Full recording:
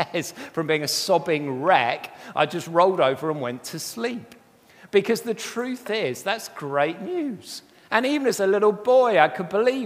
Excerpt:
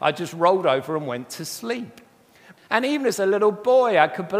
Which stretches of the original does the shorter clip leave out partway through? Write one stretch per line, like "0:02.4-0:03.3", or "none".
0:04.9-0:07.8